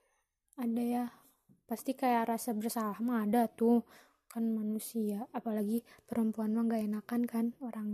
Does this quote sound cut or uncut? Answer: uncut